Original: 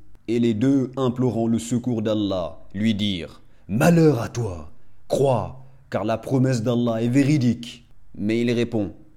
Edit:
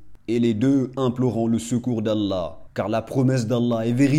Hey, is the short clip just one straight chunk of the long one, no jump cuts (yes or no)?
no